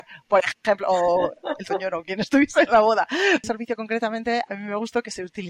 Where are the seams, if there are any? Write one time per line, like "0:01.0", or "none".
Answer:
0:03.4
0:04.5